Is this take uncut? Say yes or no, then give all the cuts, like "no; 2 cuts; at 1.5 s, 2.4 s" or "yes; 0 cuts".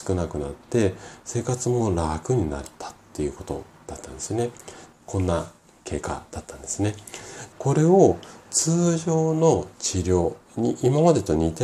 no; 2 cuts; at 4.9 s, 7.5 s